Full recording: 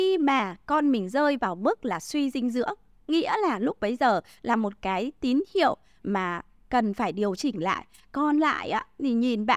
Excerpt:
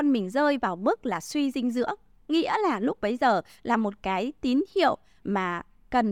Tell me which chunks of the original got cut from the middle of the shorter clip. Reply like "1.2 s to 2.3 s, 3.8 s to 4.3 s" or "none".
none